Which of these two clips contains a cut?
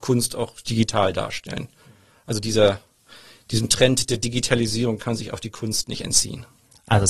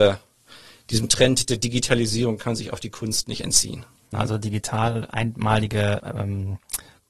second; 2 cuts; at 4.1 s, 6.0 s

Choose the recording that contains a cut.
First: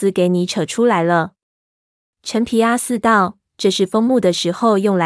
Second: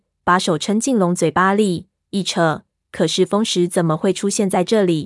second; 1 cut; at 2.8 s

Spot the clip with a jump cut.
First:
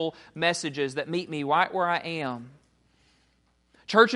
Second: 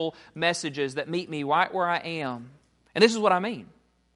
second; 1 cut; at 2.9 s

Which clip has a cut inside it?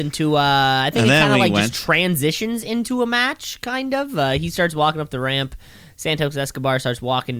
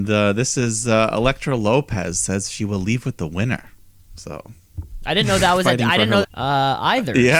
second; 1 cut; at 6.2 s

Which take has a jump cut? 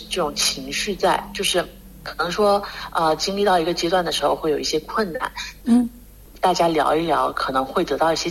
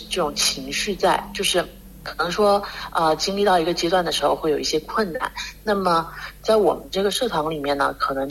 first; 1 cut; at 5.6 s

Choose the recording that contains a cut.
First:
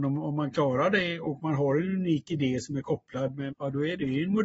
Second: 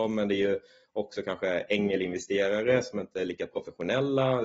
first; 1 cut; at 3.5 s

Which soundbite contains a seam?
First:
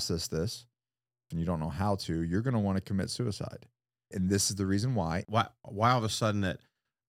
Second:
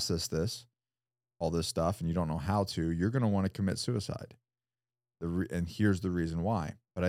first; 3 cuts; at 1.3 s, 4.1 s, 5.2 s

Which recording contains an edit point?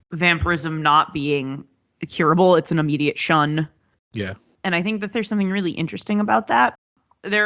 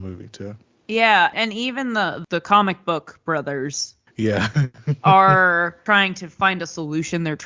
first; 1 cut; at 3.9 s

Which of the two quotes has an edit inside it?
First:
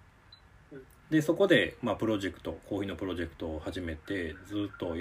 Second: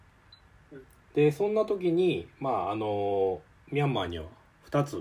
first; 1 cut; at 1.0 s

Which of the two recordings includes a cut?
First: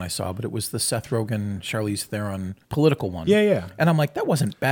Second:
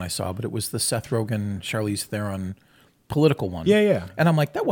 first; 1 cut; at 2.6 s

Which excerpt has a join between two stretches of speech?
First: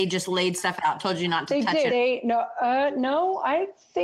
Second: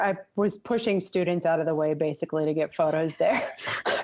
first; 1 cut; at 1.9 s

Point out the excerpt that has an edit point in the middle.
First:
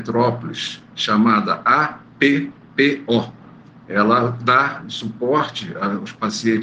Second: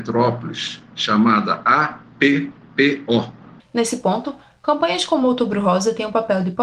second; 1 cut; at 3.6 s

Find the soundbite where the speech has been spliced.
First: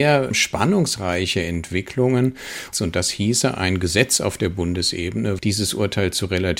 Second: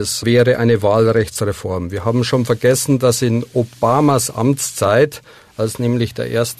first; 2 cuts; at 2.7 s, 5.4 s

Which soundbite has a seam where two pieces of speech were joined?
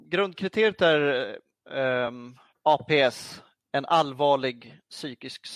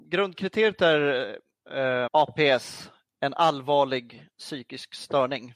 second; 1 cut; at 2.1 s

